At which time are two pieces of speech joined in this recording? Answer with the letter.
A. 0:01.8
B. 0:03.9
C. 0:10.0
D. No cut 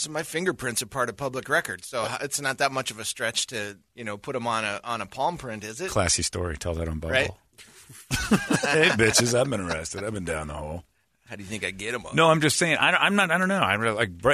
B